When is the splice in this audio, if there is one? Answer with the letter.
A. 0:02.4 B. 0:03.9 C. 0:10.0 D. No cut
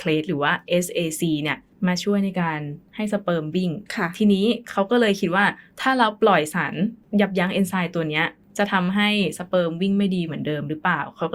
B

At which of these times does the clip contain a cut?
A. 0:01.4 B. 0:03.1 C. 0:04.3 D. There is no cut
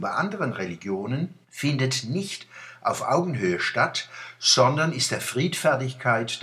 A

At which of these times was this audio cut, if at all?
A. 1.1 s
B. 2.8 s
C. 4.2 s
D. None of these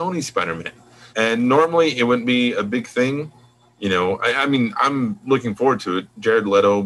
A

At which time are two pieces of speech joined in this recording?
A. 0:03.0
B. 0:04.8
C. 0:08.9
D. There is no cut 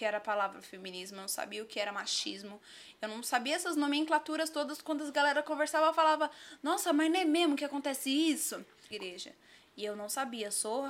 C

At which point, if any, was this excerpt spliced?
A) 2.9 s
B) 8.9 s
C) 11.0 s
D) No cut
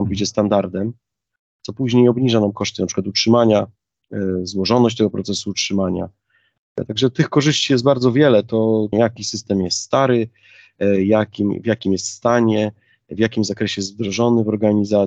B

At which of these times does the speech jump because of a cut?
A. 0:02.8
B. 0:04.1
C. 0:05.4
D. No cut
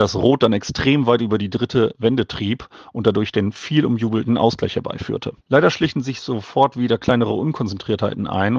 C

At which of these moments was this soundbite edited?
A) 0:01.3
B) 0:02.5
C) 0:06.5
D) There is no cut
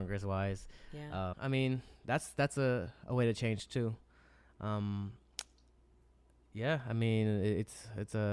A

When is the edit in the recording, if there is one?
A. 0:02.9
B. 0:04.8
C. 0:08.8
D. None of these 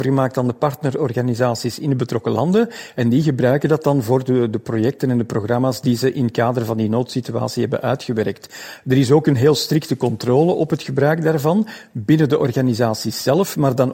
D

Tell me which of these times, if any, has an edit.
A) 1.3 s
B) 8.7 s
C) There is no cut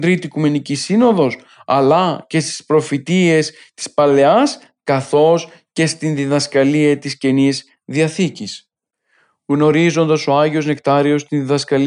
C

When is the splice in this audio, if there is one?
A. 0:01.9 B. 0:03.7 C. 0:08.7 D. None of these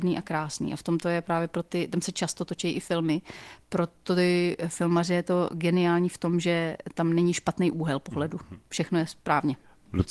D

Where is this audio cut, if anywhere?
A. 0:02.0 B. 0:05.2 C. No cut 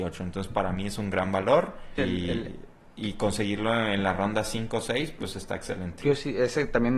A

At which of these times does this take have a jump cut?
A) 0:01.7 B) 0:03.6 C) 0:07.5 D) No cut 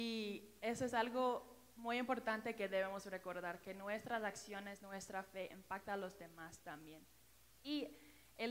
C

